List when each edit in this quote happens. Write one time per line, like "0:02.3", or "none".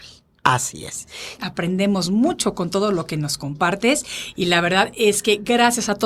0:01.4